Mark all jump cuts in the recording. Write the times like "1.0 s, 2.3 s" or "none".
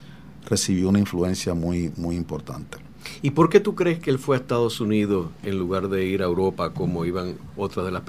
none

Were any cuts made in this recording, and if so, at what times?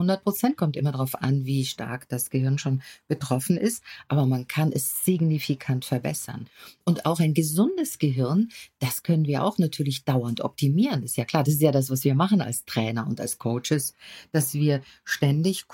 none

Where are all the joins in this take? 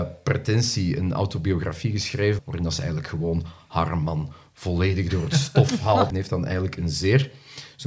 2.4 s, 6.1 s

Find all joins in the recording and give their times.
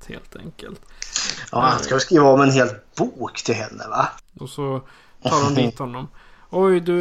4.4 s

